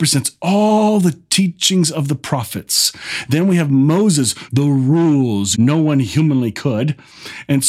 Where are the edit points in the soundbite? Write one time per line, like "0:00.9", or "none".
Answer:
0:04.5
0:05.5